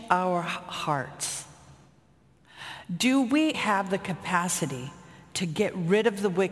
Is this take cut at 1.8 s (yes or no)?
no